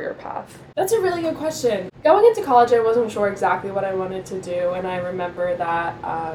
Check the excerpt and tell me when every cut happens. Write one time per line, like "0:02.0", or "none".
none